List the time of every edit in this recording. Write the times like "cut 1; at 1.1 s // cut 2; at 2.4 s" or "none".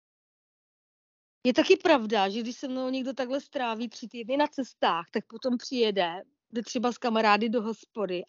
none